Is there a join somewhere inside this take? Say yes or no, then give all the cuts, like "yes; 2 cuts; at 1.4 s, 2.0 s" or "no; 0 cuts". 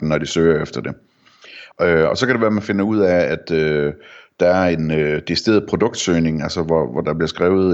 yes; 1 cut; at 1.7 s